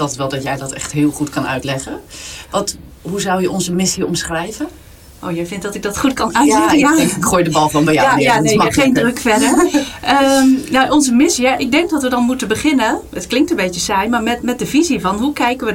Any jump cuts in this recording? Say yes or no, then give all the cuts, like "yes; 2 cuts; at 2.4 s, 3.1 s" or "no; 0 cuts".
no; 0 cuts